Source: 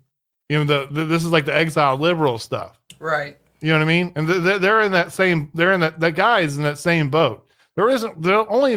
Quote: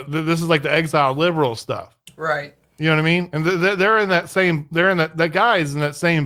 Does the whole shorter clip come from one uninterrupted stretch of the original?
yes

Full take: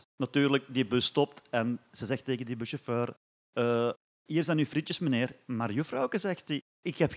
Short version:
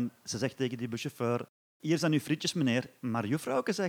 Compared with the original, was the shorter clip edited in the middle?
yes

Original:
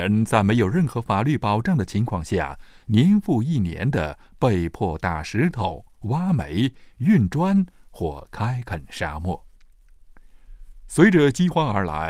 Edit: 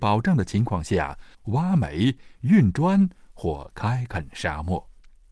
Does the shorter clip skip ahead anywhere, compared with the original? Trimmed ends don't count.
yes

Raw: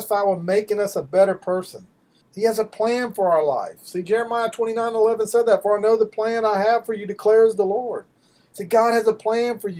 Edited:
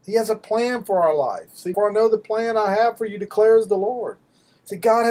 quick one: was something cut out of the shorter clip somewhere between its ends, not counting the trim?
yes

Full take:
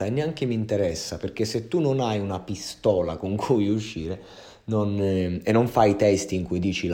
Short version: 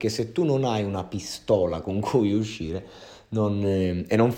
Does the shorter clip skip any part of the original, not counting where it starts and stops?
no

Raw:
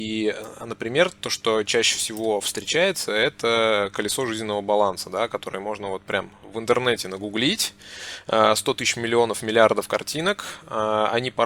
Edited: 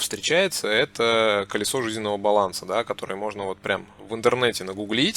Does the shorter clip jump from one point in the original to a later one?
no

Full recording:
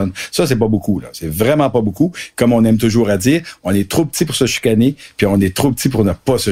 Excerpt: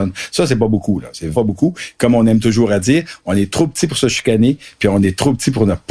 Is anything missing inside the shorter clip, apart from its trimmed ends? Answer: yes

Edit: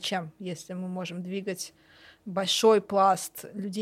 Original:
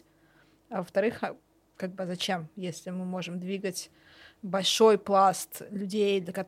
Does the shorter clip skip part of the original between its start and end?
no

